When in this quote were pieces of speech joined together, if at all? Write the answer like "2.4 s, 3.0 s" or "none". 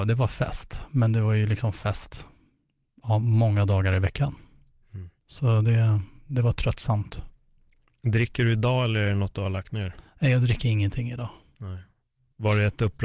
none